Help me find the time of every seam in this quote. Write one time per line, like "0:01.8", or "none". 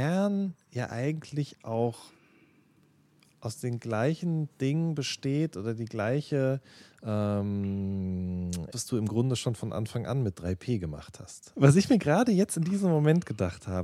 0:08.7
0:11.5